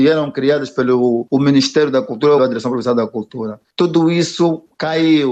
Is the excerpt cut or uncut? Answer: cut